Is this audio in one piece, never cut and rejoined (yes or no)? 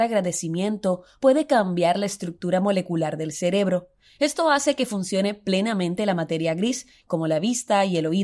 no